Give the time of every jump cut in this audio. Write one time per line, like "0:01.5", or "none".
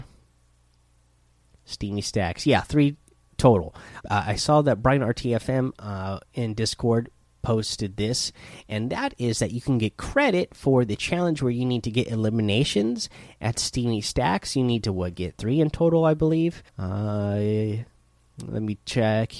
0:04.0
0:16.7